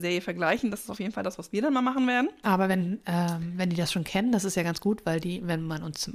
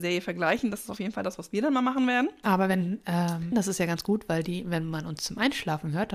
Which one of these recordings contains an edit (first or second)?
second